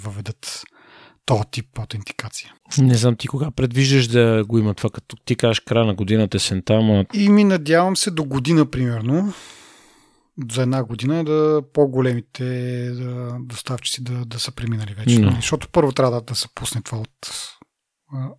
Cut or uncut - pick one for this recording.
uncut